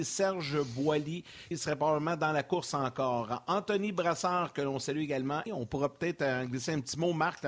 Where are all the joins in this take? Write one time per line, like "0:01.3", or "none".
0:01.5
0:05.5